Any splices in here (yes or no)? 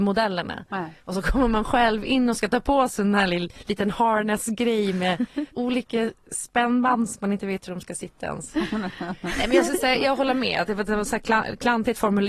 no